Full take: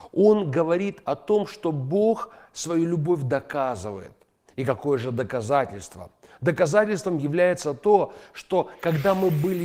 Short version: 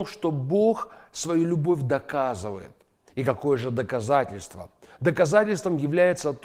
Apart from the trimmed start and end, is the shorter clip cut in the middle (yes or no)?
no